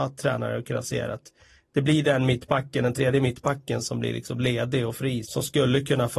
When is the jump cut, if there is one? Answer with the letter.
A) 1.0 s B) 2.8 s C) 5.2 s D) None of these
C